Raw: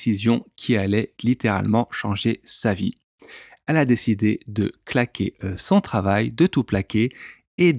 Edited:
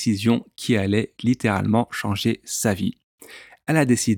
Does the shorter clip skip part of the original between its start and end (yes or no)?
no